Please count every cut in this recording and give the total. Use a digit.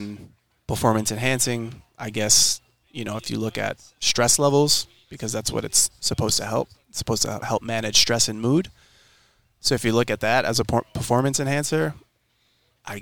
1